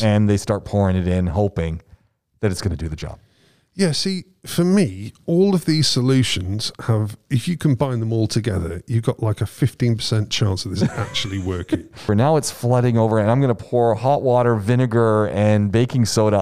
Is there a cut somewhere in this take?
yes; 1 cut; at 12.1 s

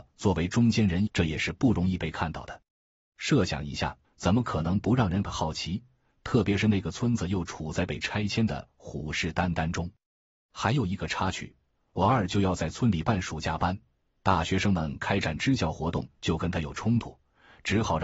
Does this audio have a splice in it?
yes; 2 cuts; at 1.1 s, 4.0 s

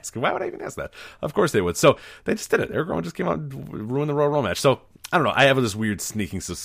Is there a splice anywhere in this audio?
no; 0 cuts

